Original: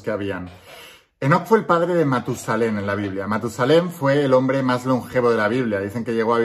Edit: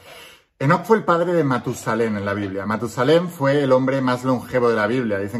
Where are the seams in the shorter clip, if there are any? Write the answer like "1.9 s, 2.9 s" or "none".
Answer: none